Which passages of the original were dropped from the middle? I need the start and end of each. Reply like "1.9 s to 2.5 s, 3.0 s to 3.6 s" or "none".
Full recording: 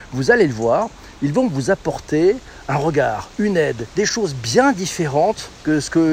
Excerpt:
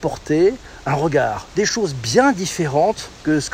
3.3 s to 3.9 s